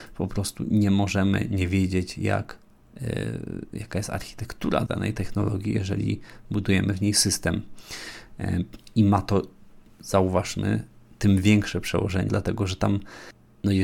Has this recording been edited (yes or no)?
yes